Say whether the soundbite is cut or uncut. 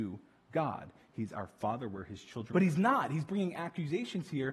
cut